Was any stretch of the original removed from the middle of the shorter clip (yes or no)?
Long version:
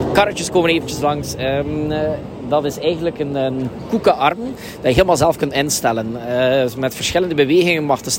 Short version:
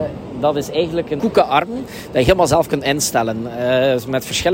yes